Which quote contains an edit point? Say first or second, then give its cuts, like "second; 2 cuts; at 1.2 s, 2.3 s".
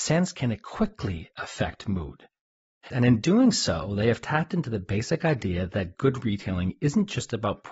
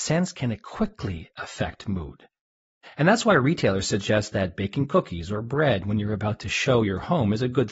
first; 1 cut; at 2.9 s